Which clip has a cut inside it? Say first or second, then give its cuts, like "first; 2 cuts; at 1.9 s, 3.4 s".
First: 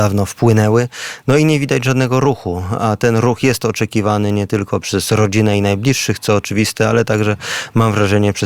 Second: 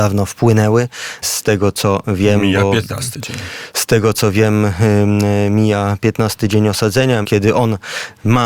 second; 2 cuts; at 1.2 s, 7.2 s